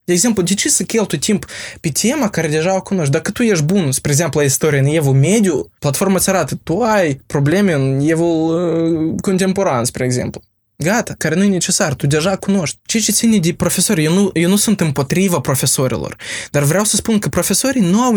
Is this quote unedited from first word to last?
no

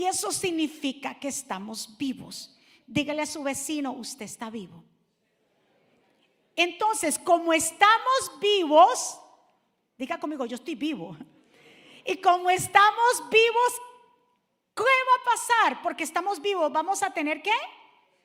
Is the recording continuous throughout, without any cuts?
yes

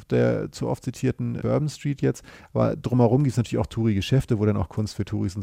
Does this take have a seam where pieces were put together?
yes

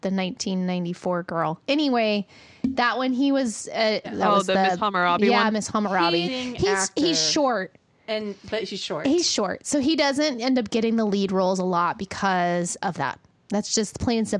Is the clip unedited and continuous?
no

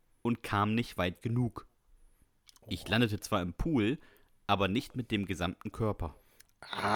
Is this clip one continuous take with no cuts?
yes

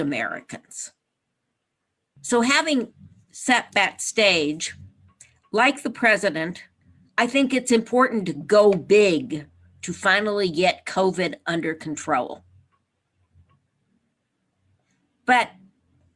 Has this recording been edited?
no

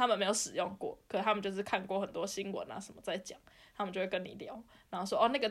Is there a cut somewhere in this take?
no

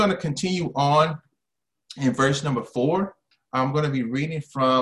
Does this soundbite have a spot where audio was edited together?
yes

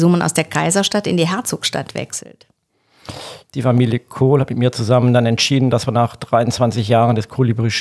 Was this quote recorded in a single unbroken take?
no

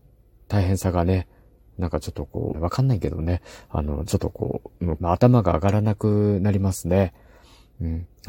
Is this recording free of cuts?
no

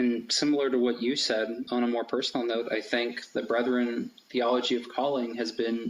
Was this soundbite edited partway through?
no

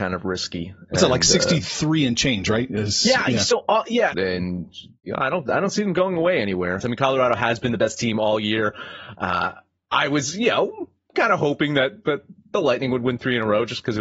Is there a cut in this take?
yes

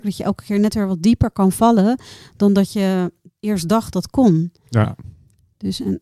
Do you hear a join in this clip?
no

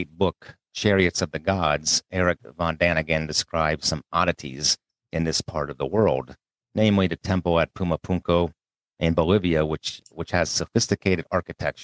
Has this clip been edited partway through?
yes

